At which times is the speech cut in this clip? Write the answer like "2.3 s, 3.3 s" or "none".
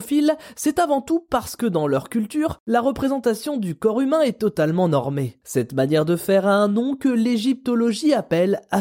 5.4 s